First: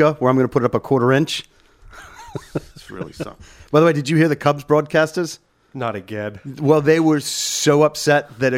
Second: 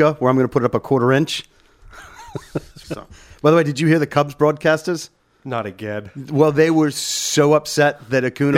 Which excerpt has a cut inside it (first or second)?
second